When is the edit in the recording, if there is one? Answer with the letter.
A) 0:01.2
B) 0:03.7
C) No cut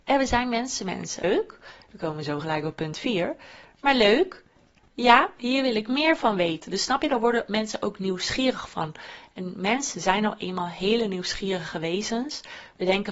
A